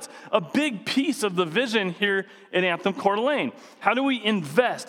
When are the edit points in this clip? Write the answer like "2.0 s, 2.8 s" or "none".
3.8 s

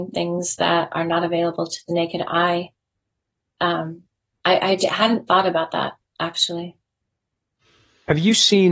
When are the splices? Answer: none

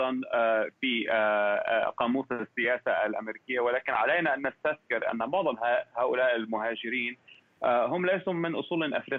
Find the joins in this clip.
none

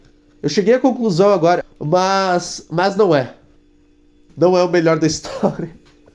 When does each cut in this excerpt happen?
1.6 s, 4.3 s

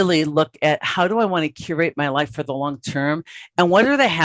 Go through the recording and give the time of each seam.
none

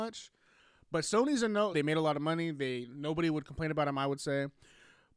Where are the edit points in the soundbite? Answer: 1.7 s

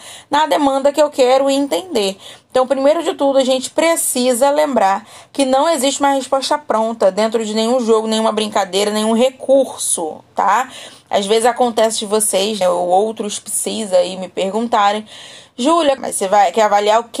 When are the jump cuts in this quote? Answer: 12.6 s, 16.0 s

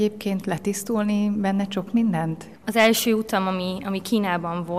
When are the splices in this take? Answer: none

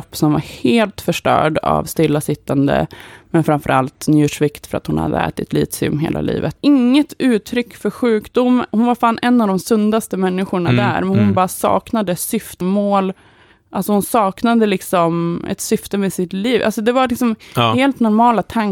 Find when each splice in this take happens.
6.6 s, 12.6 s

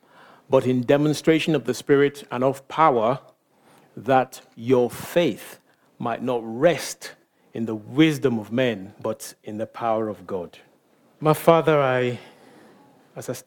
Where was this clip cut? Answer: 8.9 s, 11.1 s

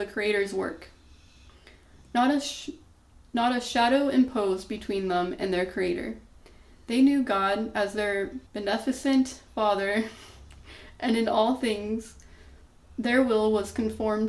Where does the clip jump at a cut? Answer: 8.5 s

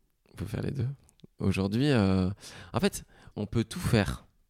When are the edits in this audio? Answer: 1.4 s, 3.3 s

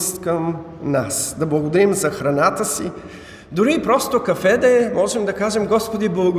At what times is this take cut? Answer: none

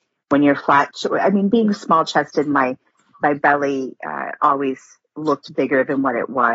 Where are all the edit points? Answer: none

